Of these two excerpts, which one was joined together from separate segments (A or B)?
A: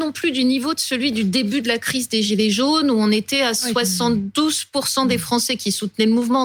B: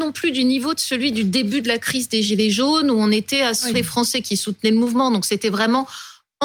B